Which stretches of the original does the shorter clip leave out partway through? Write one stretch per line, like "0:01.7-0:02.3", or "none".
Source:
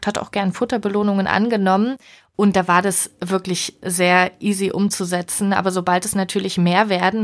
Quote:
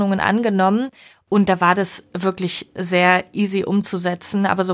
none